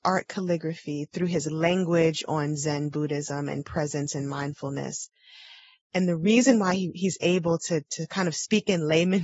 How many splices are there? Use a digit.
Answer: 0